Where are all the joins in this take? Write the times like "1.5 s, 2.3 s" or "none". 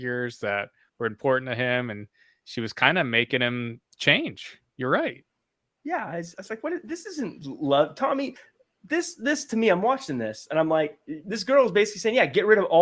none